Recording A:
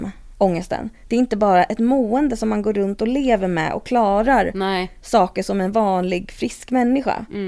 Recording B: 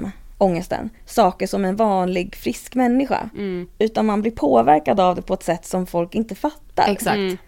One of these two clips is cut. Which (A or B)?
B